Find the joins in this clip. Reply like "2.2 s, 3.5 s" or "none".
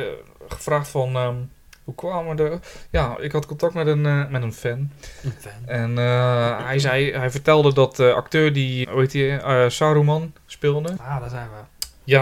8.8 s, 11.0 s

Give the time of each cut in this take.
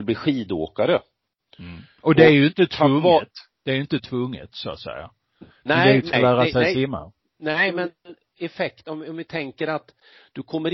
6.1 s

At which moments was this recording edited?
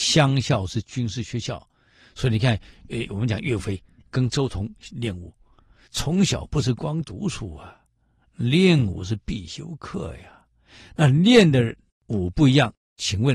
5.9 s

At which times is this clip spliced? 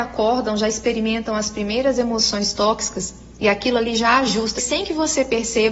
4.6 s

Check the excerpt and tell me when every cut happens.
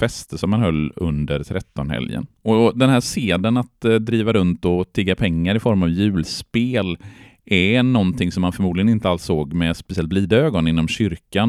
none

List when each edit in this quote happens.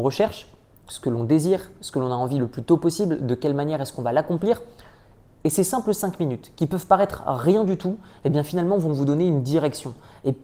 none

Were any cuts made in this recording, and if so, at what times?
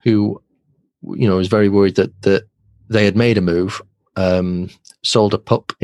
none

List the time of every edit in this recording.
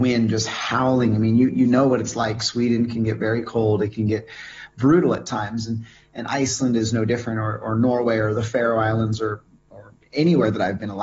none

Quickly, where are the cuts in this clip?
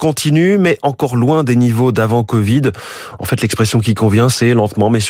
none

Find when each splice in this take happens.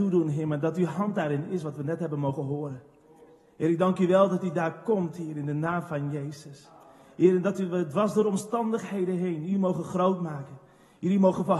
none

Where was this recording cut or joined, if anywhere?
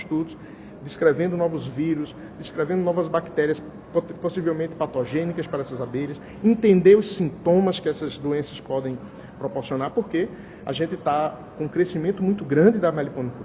none

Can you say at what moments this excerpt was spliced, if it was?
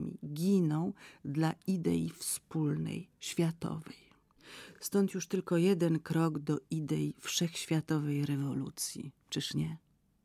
none

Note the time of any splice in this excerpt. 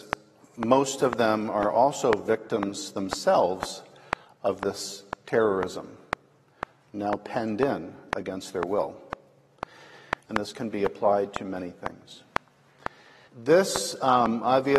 10.3 s, 13.3 s

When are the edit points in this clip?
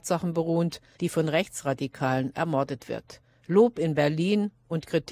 1.0 s

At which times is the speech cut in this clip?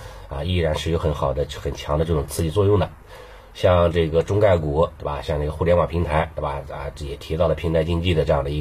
3.5 s

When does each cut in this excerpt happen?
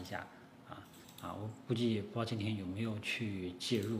1.0 s

